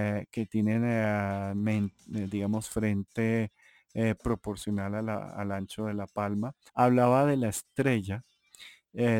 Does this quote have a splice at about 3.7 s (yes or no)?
no